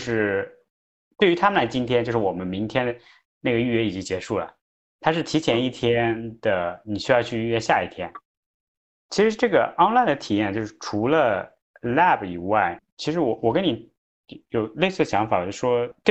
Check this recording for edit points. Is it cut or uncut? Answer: uncut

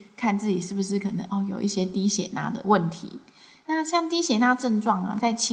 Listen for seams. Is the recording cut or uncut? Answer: uncut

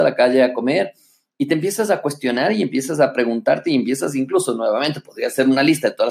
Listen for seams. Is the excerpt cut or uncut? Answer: uncut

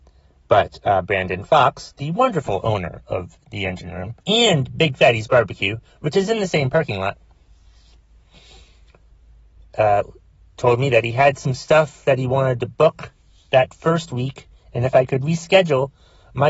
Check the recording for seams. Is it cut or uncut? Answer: cut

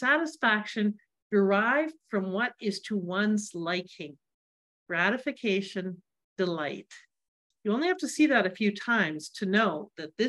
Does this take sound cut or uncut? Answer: cut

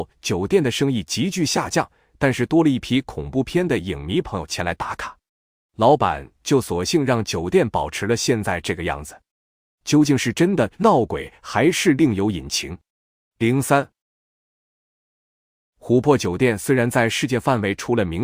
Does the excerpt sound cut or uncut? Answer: cut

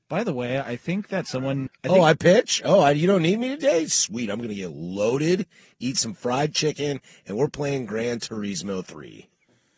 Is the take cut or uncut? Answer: cut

